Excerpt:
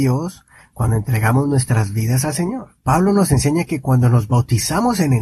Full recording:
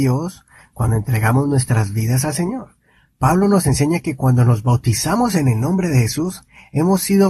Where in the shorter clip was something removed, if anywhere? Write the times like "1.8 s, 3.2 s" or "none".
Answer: 2.8 s

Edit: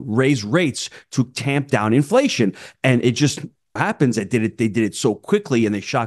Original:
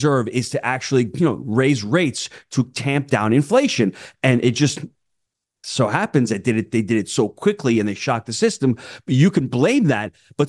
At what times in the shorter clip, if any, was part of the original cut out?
3.8 s

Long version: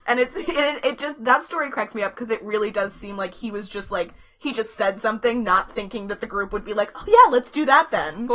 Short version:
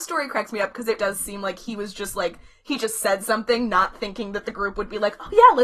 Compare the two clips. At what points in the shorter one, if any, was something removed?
1.0 s

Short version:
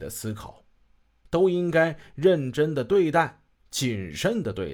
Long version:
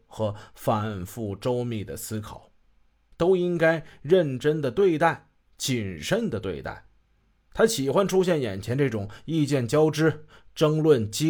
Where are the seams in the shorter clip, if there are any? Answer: none

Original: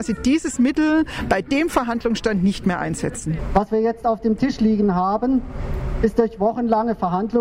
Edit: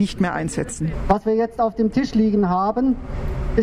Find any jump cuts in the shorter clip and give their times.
none

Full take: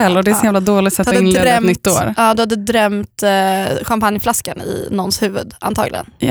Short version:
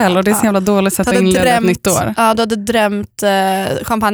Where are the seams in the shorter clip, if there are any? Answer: none

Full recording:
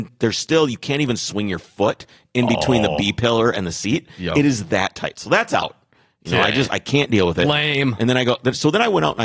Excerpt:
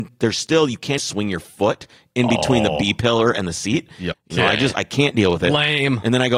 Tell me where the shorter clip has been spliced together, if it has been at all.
1.0 s, 4.1 s

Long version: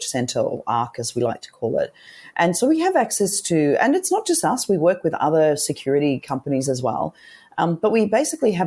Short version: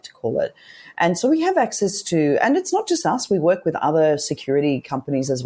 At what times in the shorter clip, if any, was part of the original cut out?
none

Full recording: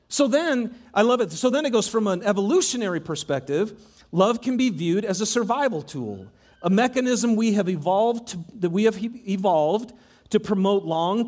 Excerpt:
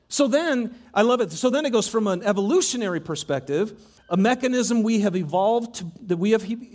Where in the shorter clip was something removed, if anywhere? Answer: 4.0 s

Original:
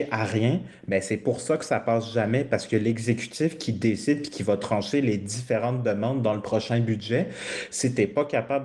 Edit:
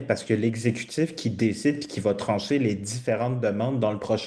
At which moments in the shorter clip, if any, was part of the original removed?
none

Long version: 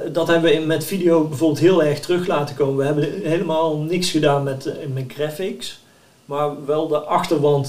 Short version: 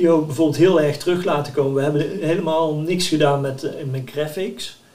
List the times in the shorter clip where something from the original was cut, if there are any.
none

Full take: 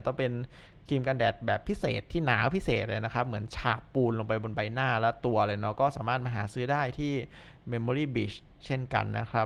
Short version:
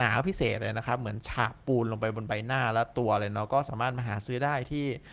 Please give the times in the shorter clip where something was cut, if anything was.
none

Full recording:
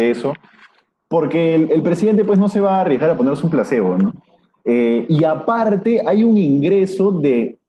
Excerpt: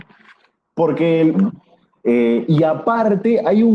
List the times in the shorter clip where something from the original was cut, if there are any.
1.3 s

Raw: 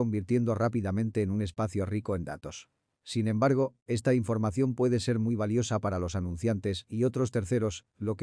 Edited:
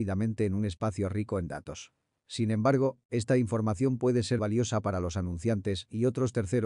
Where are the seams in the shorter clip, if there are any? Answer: 4.4 s

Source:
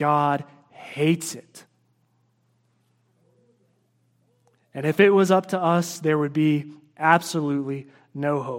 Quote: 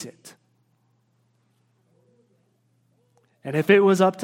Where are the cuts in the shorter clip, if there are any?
none

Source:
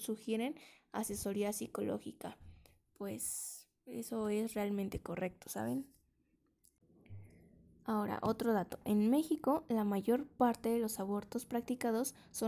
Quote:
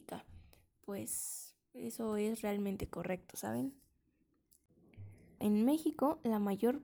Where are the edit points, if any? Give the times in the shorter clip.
5.4 s

